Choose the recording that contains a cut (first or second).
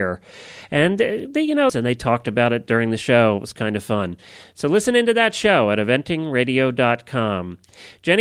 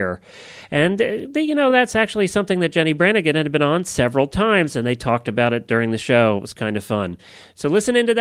first